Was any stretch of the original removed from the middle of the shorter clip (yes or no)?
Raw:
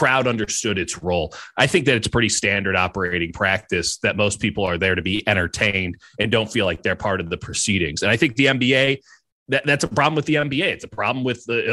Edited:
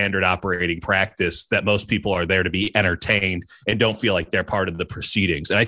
no